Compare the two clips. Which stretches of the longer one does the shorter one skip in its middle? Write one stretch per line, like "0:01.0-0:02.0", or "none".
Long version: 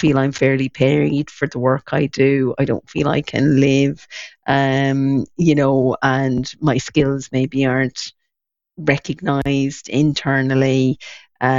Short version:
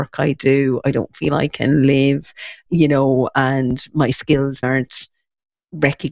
0:04.4-0:05.3
0:07.3-0:07.7